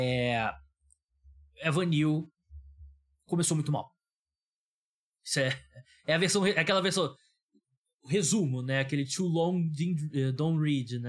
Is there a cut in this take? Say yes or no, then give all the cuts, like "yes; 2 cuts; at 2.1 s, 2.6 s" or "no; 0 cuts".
no; 0 cuts